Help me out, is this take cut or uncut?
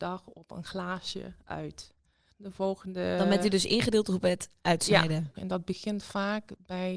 cut